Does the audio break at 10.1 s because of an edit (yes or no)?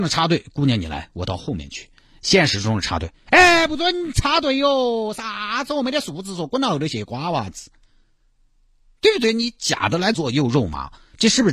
yes